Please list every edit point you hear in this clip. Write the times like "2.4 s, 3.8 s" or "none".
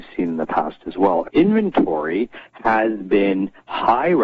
1.2 s